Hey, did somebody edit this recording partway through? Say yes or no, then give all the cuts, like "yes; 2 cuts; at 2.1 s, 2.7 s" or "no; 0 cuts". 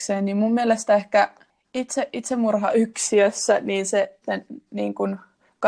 yes; 1 cut; at 4.2 s